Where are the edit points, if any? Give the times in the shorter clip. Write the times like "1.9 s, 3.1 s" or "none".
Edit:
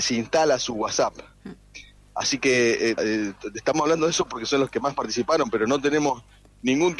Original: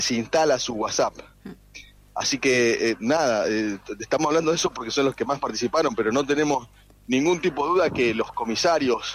3.0 s

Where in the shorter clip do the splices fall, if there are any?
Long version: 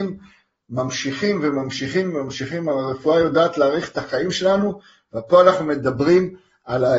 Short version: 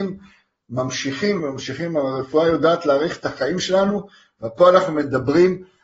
1.4 s

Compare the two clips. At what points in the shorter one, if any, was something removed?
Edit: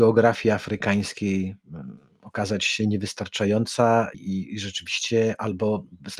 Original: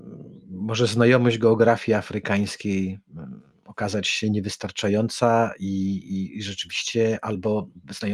4.1 s

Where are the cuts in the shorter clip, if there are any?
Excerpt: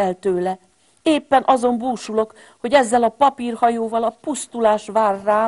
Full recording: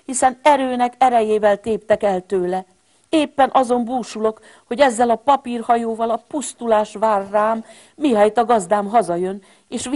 none

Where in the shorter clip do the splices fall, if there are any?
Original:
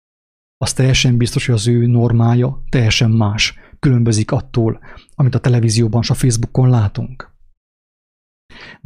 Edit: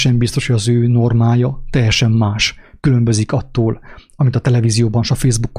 none

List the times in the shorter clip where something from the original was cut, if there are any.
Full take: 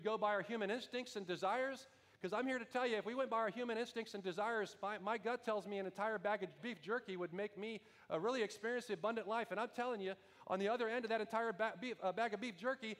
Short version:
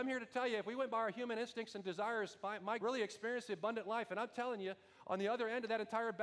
2.8 s

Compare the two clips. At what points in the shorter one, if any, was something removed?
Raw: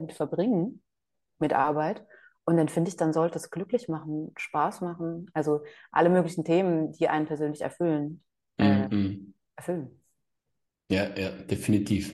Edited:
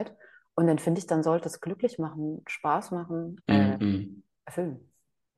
3.4 s

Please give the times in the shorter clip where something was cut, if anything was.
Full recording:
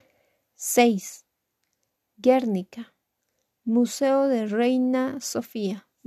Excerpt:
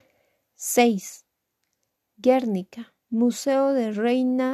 3.0 s

